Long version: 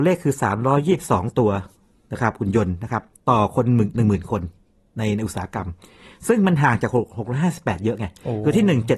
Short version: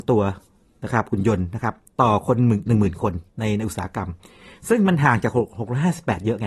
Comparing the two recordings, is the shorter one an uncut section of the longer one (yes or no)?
no